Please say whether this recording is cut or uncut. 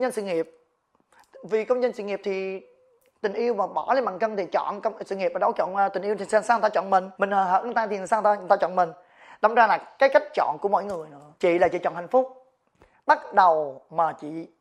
cut